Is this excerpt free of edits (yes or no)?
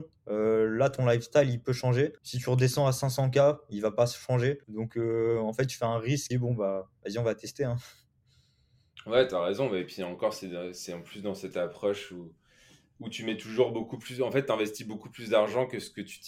no